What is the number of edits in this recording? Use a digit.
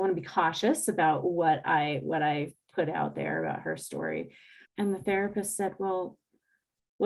1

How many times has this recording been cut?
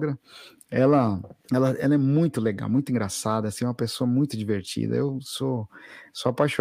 1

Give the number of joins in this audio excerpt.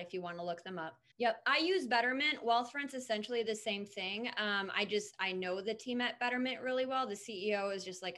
1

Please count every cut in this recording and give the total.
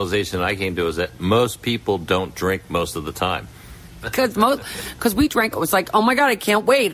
2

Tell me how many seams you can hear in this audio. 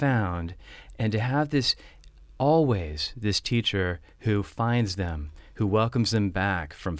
0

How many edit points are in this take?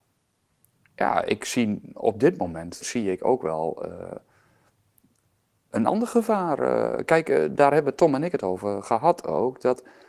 1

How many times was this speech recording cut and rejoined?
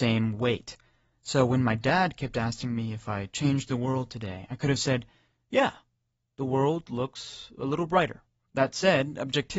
1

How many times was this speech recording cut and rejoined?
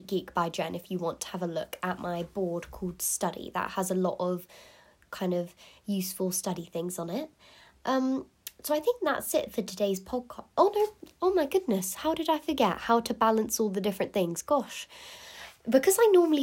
0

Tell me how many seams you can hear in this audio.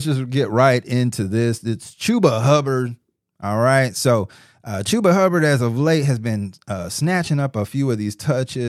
0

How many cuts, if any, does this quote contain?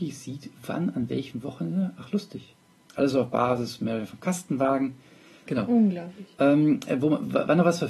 2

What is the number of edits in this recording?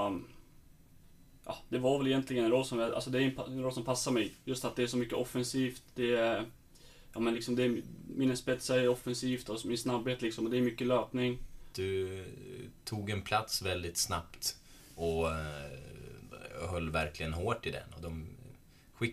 1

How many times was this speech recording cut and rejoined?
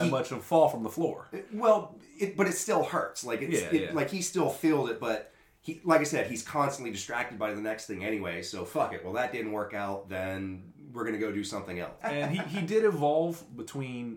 1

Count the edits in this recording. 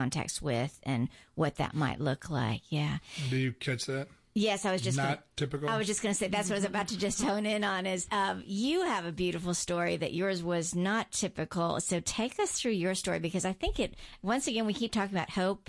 0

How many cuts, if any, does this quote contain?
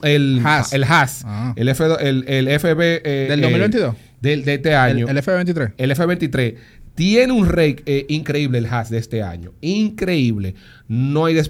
0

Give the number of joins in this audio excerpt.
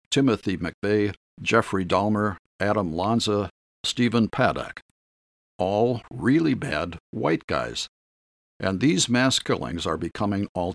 0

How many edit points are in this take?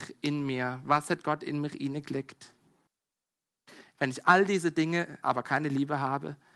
2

